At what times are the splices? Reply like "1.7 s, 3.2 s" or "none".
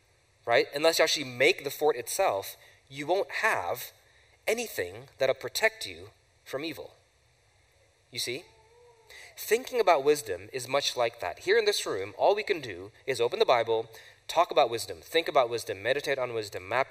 none